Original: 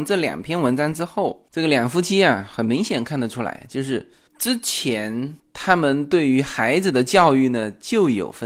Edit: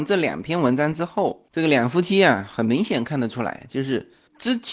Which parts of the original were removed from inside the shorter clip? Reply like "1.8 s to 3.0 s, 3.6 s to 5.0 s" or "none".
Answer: none